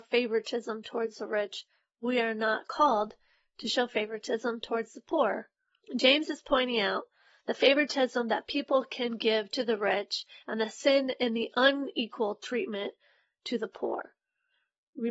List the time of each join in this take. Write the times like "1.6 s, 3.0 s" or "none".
5.8 s

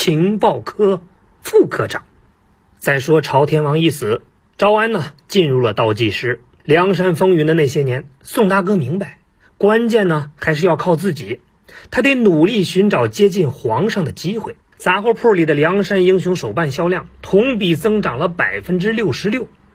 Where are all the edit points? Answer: 6.6 s, 14.7 s

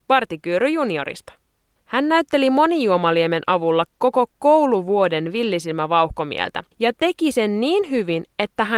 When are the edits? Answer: 1.8 s, 6.7 s

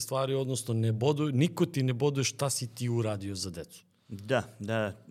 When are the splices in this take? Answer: none

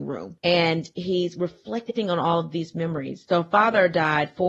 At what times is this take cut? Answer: 3.3 s

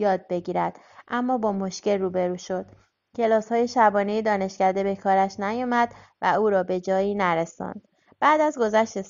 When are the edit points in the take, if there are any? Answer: none

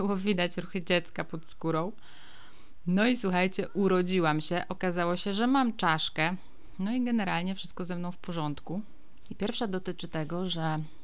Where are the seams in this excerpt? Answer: 9.3 s

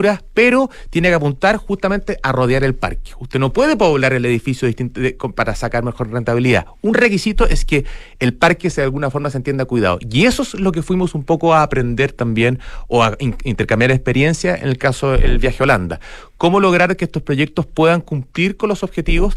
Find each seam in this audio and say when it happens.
none

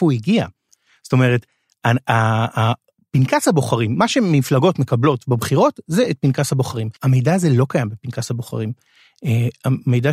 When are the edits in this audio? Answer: 7.0 s

